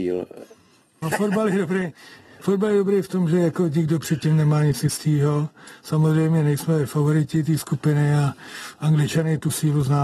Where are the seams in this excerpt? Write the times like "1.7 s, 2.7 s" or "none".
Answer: 1.0 s